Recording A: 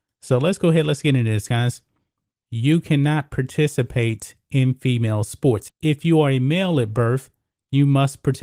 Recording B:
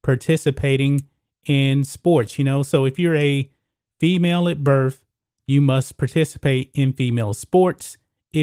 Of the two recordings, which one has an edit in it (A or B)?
A